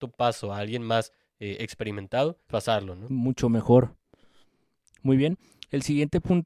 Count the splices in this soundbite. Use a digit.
1